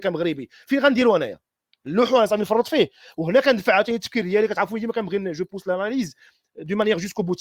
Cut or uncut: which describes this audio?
uncut